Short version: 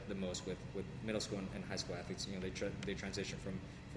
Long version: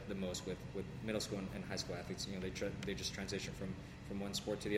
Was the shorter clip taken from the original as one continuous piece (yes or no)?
no